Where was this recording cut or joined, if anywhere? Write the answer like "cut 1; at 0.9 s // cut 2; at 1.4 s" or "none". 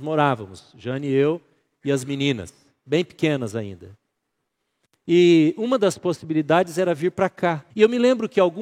cut 1; at 7.7 s